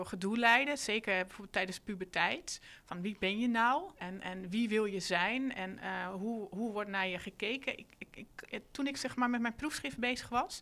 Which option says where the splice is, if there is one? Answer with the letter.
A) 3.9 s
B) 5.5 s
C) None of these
A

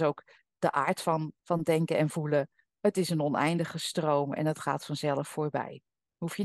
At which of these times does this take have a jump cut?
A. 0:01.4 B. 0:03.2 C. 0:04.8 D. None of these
A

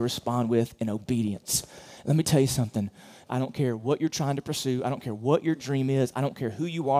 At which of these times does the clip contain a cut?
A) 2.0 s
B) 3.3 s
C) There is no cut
B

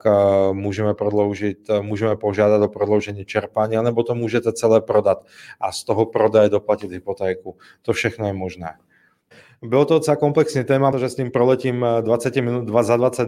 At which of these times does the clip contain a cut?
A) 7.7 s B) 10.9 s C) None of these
B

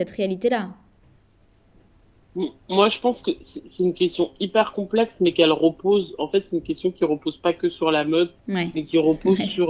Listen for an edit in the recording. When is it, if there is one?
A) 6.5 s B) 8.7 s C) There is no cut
C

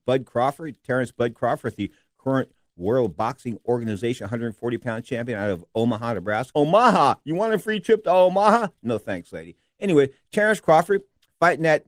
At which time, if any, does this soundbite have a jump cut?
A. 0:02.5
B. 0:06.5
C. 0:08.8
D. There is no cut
B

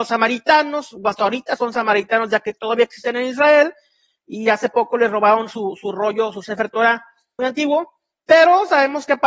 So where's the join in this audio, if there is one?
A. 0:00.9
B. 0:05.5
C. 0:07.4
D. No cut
C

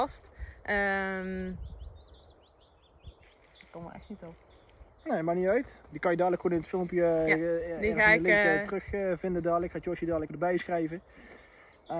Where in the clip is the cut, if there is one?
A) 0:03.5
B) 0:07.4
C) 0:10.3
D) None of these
C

